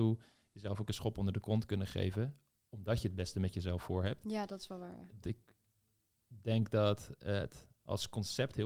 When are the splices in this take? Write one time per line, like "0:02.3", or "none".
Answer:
0:05.2